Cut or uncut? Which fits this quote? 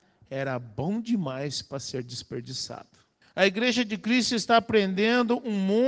cut